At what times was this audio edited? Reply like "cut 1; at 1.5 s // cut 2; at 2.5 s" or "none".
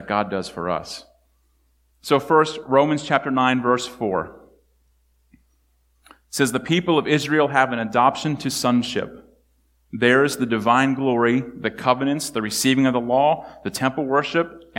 none